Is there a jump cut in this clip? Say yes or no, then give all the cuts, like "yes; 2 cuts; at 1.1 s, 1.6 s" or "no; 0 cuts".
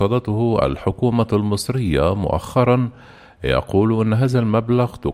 no; 0 cuts